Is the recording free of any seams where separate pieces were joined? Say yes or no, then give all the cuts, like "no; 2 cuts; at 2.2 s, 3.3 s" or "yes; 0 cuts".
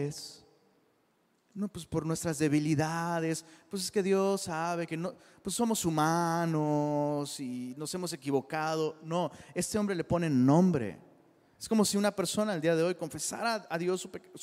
yes; 0 cuts